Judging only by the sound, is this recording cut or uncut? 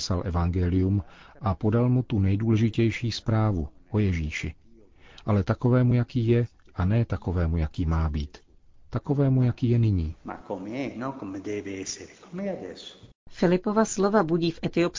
uncut